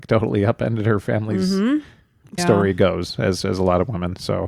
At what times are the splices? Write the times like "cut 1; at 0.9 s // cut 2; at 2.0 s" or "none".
cut 1; at 2.4 s

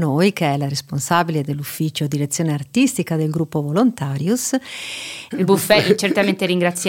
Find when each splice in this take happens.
cut 1; at 5.3 s

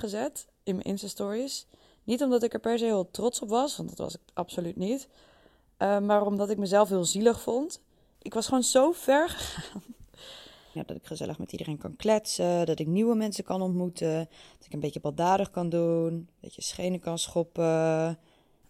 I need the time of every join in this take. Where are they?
cut 1; at 10.8 s

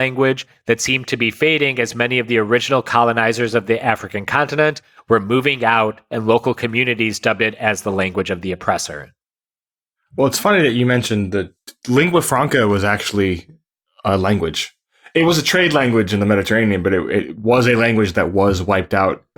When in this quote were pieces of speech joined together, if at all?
none

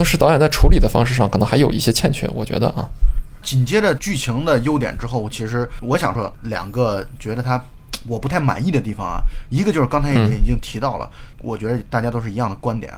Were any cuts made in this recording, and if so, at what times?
cut 1; at 6.2 s // cut 2; at 11.3 s

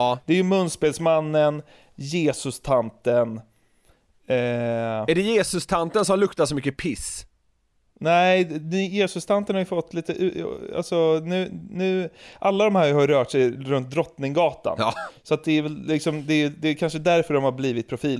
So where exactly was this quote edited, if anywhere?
none

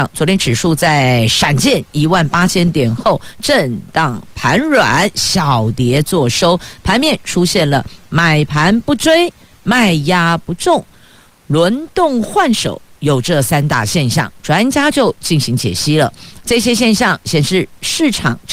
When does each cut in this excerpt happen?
none

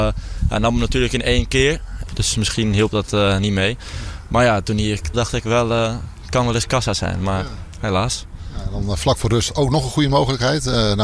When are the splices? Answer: cut 1; at 2.1 s // cut 2; at 5.1 s

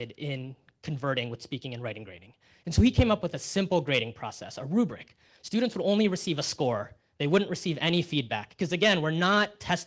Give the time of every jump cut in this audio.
none

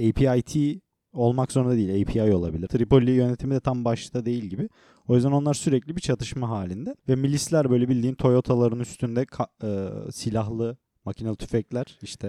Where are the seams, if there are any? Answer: cut 1; at 2.7 s // cut 2; at 7.0 s

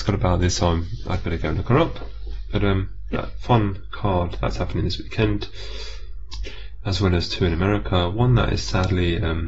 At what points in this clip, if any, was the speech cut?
cut 1; at 3.1 s

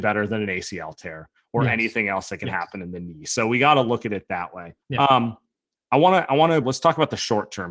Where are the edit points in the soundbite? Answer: cut 1; at 4.8 s // cut 2; at 6.6 s

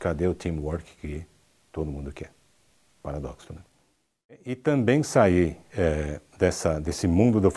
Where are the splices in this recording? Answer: none

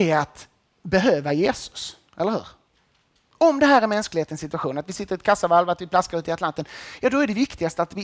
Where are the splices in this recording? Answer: none

